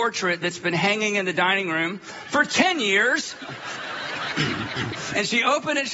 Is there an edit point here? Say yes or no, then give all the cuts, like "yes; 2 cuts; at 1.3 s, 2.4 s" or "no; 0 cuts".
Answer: no; 0 cuts